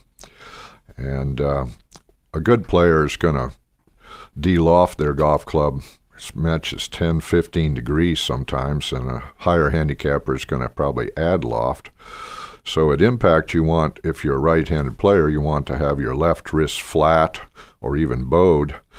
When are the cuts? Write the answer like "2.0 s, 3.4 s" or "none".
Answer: none